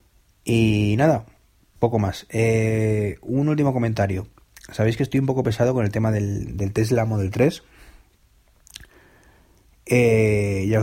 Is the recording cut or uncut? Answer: uncut